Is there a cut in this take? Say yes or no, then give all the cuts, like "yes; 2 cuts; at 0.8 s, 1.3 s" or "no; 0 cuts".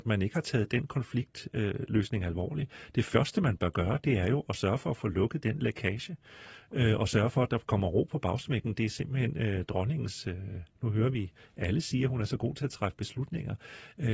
no; 0 cuts